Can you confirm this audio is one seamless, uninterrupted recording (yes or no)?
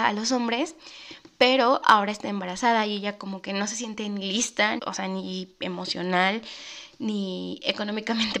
no